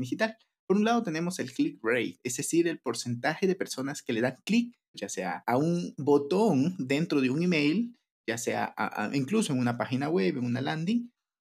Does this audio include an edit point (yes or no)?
yes